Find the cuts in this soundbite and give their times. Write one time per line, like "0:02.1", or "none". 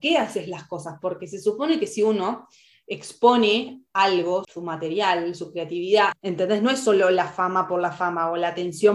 0:04.4
0:06.1